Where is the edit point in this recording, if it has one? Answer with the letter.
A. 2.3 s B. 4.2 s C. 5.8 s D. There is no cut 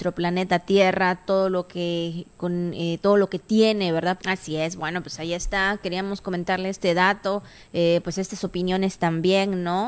B